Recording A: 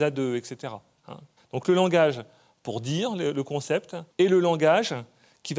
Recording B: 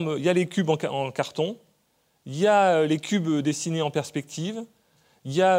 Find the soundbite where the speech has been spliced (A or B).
A